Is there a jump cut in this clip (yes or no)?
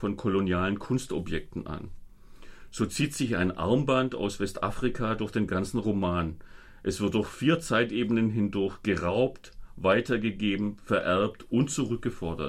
no